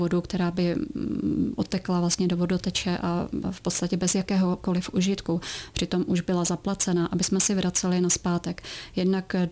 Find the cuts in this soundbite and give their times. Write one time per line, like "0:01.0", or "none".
none